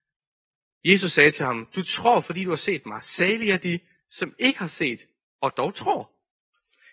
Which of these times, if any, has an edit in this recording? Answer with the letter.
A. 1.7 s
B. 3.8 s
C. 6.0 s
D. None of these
D